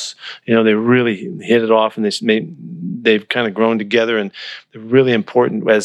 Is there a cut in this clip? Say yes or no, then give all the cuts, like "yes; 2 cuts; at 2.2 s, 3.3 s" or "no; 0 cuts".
no; 0 cuts